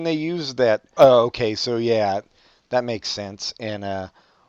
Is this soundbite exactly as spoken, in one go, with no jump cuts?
no; 1 cut; at 1.0 s

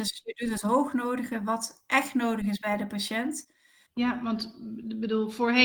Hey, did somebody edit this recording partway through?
yes; 1 cut; at 3.9 s

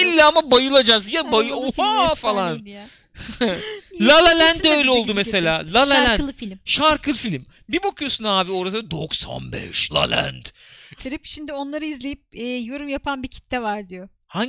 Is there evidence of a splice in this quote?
yes; 2 cuts; at 9.9 s, 11.0 s

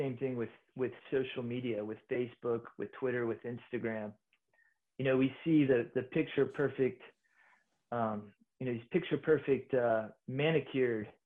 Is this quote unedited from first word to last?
yes; 0 cuts

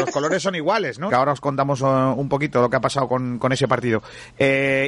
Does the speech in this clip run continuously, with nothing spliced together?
no; 1 cut; at 1.1 s

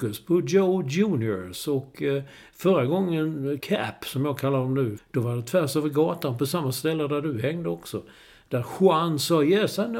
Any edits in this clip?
yes; 2 cuts; at 3.6 s, 5.0 s

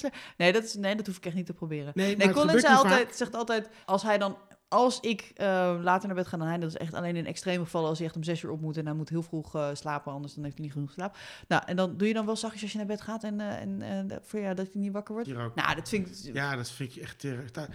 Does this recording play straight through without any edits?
no; 2 cuts; at 3.8 s, 15.2 s

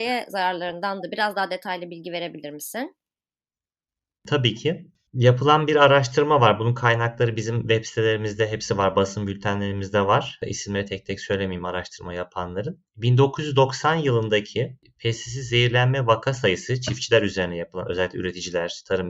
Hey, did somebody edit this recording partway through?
no; 0 cuts

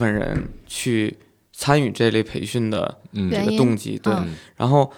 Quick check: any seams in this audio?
no; 0 cuts

